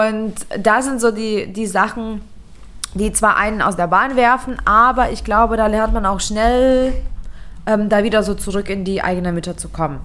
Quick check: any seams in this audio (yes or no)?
no